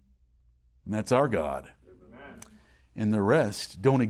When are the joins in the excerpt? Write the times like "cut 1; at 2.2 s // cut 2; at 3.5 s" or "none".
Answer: none